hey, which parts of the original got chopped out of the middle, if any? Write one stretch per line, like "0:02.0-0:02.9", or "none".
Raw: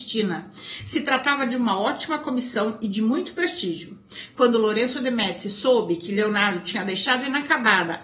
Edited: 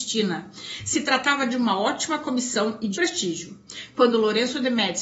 0:03.0-0:03.4